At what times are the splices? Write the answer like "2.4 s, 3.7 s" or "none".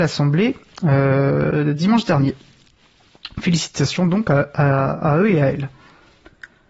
none

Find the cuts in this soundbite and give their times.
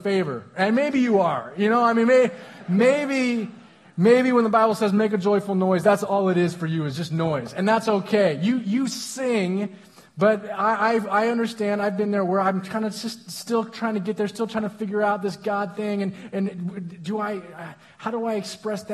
none

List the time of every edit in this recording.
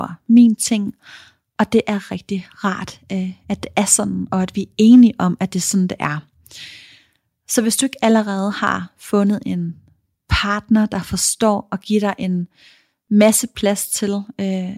2.1 s

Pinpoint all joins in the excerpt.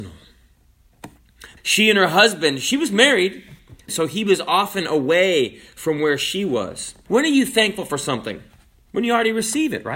1.6 s, 3.9 s, 7.1 s

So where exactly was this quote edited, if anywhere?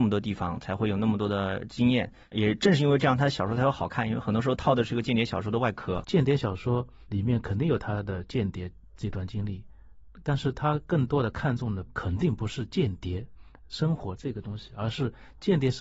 6.0 s

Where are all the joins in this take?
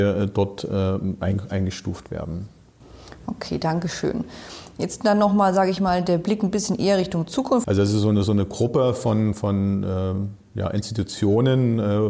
7.6 s

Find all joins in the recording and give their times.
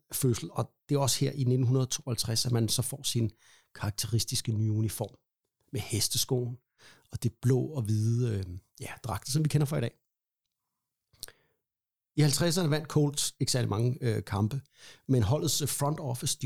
none

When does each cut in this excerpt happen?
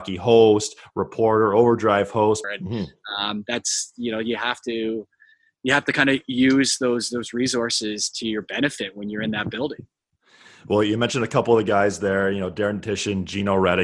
2.4 s

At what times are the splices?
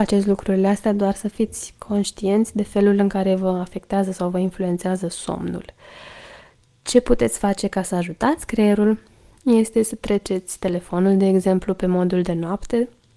none

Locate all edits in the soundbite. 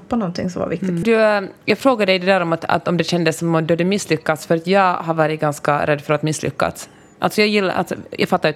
1.0 s

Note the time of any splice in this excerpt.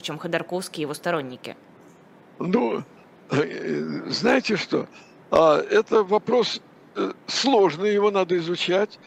none

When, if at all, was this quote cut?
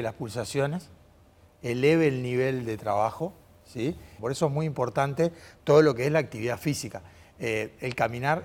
4.2 s

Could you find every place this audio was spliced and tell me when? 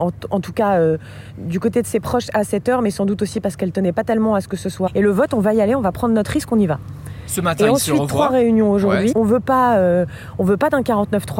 4.9 s, 9.1 s

